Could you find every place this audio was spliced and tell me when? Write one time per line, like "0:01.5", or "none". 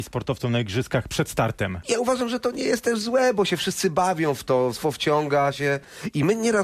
0:04.8